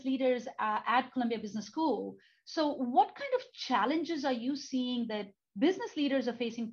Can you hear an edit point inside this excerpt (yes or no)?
no